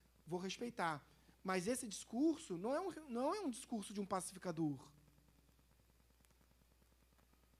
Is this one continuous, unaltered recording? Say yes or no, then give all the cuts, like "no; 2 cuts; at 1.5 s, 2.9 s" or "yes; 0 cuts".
yes; 0 cuts